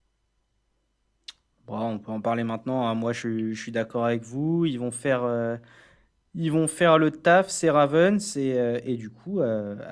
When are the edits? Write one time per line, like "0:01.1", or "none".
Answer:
none